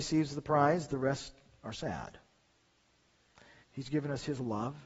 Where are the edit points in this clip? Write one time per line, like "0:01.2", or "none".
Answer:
0:03.6